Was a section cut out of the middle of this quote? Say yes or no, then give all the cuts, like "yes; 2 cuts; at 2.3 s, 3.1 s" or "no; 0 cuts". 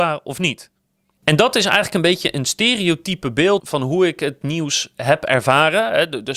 yes; 2 cuts; at 1.2 s, 3.6 s